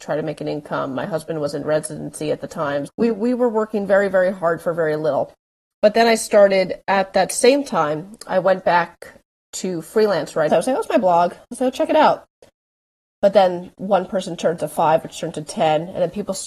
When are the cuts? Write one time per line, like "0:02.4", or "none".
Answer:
0:02.9
0:05.7
0:10.5